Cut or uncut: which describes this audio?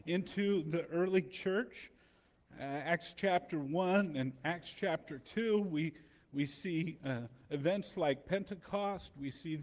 uncut